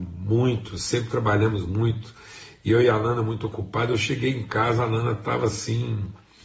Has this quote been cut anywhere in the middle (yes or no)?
no